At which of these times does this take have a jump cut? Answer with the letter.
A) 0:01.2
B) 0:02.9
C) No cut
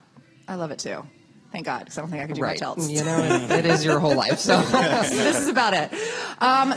C